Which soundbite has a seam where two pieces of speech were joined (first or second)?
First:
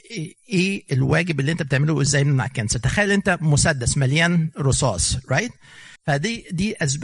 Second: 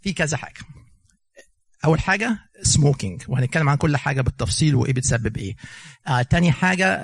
first